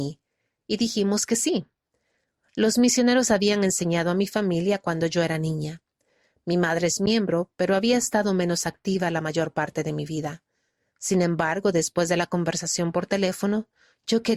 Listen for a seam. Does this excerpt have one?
no; 0 cuts

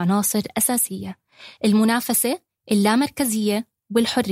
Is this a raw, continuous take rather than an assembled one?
yes; 0 cuts

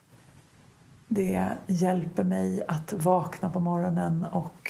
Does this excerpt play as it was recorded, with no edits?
yes; 0 cuts

